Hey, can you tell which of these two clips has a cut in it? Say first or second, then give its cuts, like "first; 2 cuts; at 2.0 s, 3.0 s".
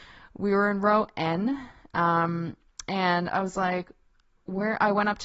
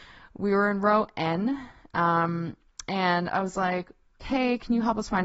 second; 1 cut; at 4.2 s